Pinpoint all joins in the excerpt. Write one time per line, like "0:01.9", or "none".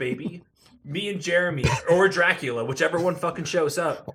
none